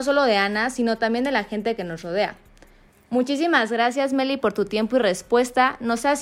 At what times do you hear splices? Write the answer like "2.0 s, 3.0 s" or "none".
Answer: none